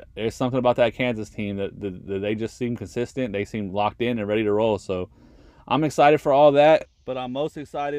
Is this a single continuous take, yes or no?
yes